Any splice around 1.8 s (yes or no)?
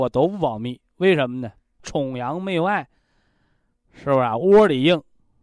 yes